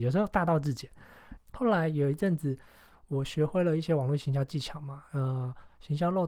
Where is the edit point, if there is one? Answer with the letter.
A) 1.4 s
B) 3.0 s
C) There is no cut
A